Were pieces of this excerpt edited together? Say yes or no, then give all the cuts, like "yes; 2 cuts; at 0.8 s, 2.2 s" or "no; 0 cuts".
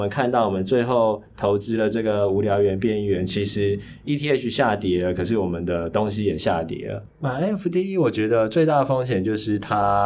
yes; 1 cut; at 7.1 s